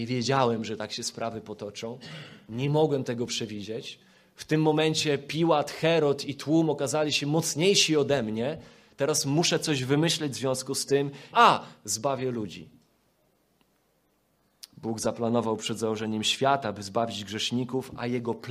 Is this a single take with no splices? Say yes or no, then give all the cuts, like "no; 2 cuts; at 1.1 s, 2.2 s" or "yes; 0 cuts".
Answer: no; 1 cut; at 11.3 s